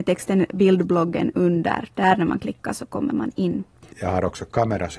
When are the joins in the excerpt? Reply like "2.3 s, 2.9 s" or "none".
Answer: 3.9 s